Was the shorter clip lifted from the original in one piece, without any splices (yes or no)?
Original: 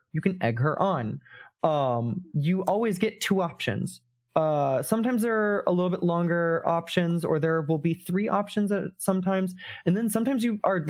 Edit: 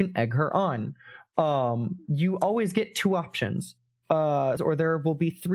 no